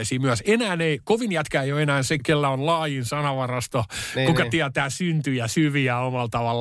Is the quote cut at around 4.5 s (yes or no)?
no